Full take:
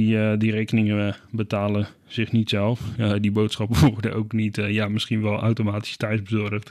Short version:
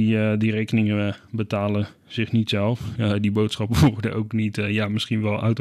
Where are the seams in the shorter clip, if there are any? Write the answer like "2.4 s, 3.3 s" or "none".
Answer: none